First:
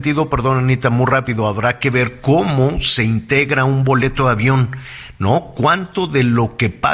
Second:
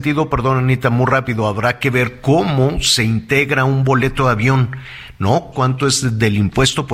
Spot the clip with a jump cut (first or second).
second